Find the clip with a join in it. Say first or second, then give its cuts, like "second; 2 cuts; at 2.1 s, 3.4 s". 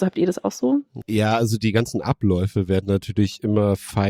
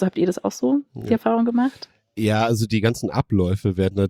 first; 1 cut; at 1.0 s